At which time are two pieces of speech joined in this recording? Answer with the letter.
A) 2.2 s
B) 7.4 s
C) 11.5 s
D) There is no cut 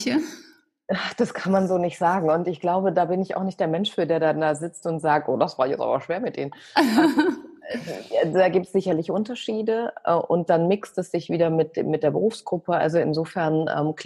D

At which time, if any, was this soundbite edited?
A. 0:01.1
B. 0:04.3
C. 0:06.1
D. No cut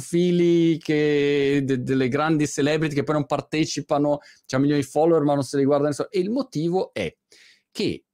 C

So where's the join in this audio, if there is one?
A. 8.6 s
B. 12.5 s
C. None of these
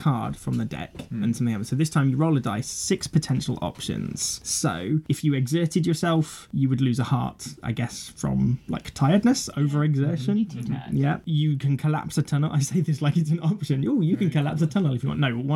C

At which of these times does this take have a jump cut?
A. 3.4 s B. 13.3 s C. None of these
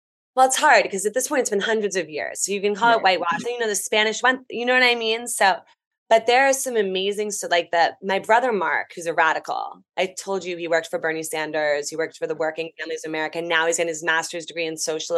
A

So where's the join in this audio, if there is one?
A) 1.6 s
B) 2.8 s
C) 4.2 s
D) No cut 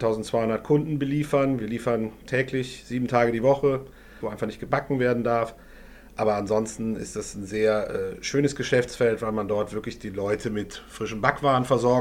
C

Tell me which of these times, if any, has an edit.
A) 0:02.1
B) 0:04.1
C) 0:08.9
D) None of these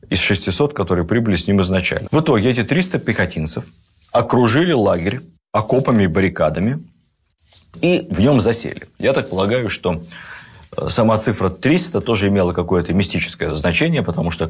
A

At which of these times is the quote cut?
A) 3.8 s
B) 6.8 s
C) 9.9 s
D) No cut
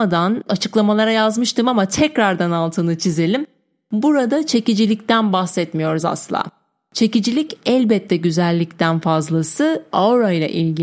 C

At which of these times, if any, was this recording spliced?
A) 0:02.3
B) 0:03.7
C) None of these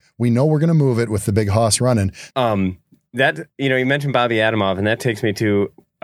A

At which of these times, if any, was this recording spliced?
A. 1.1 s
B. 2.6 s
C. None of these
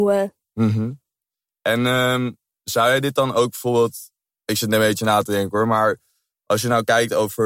C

